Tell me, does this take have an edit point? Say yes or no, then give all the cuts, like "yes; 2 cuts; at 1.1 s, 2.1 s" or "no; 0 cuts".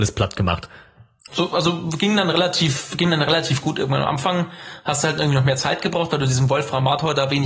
yes; 1 cut; at 1.3 s